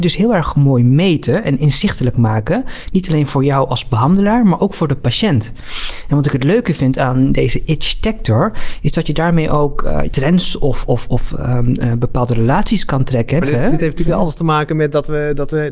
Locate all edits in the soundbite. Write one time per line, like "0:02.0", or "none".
0:10.1
0:13.4

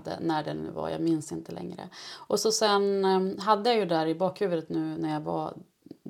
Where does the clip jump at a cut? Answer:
none

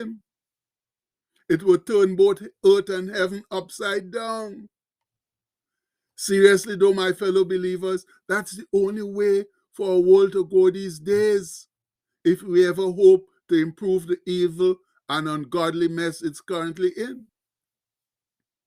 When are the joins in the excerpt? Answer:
none

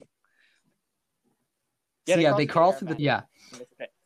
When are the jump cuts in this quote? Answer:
0:03.0

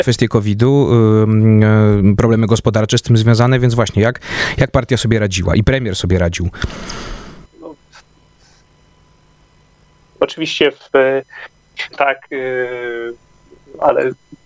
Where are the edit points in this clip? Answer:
0:07.4
0:11.9

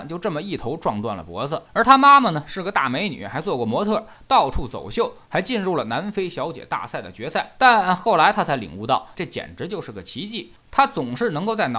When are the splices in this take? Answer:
0:01.6
0:07.6
0:09.1

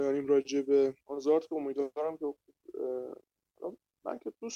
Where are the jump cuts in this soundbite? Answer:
0:01.0

